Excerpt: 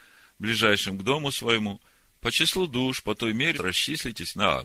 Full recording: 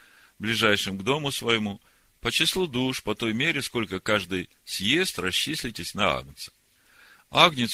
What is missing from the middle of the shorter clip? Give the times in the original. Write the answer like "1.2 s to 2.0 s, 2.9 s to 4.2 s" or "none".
3.5 s to 5.1 s

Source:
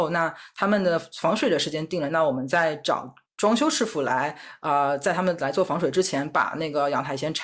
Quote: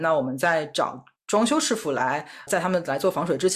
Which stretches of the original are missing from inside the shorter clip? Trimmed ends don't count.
4.6 s to 5.0 s

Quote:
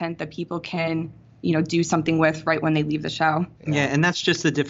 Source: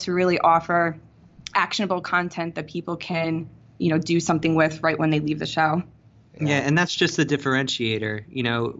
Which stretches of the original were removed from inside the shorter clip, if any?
5.9 s to 6.3 s

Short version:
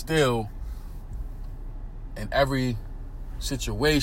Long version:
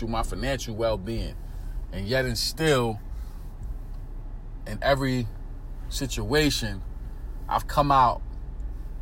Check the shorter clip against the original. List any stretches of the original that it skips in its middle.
none

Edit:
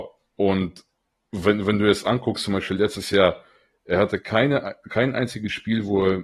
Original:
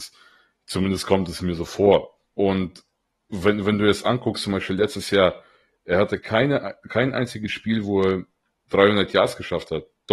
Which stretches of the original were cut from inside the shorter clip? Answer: none

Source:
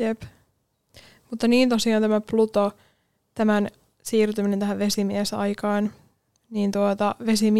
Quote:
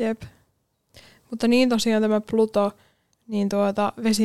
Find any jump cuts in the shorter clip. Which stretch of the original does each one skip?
3.1 s to 6.3 s

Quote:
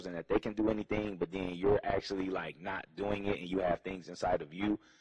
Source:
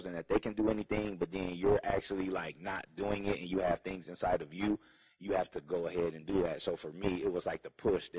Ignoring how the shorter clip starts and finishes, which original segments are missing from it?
none

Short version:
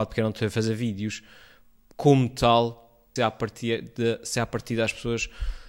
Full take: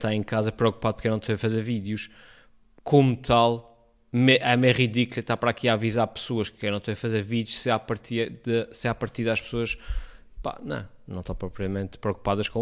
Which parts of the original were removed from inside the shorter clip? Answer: 4.0 s to 7.6 s

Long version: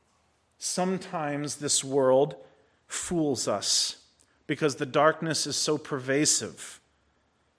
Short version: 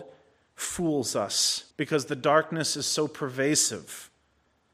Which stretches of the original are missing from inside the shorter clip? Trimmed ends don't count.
4.0 s to 4.4 s

